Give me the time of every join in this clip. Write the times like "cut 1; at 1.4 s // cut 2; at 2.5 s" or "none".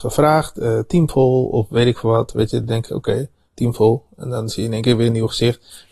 none